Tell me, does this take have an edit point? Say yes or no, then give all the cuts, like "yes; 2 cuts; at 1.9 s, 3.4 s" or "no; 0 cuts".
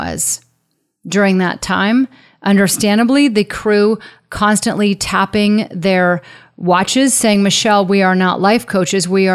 no; 0 cuts